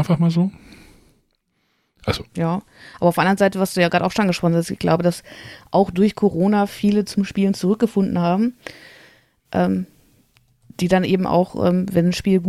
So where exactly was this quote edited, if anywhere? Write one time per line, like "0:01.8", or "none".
none